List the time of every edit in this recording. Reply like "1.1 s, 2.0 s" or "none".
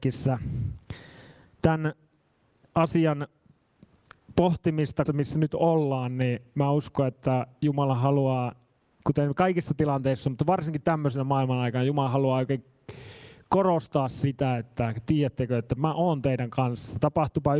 5.1 s